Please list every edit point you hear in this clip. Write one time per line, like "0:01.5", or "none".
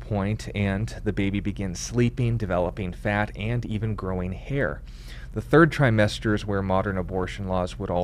none